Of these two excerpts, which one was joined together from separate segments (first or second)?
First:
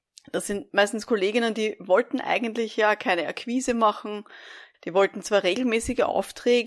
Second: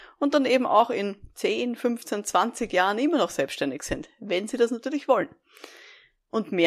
first